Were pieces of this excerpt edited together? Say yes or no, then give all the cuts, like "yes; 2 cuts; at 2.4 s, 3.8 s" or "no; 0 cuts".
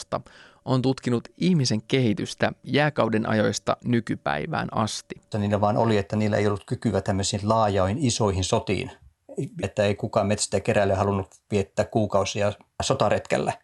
yes; 2 cuts; at 5.3 s, 9.6 s